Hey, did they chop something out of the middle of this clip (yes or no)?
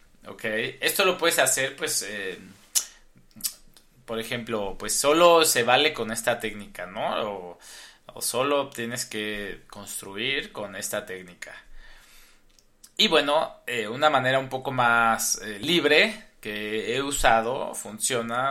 no